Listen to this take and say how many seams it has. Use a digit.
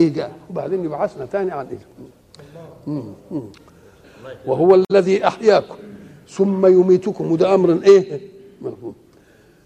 1